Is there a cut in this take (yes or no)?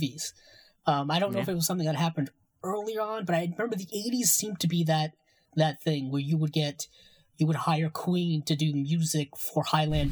no